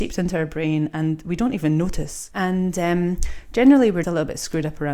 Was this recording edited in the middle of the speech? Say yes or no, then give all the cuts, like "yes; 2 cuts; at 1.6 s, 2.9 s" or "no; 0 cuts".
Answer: yes; 2 cuts; at 2.3 s, 4.0 s